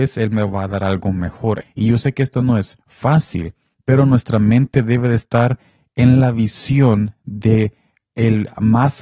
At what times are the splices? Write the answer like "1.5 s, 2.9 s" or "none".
1.6 s